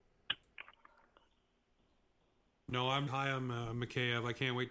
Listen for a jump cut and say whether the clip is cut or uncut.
cut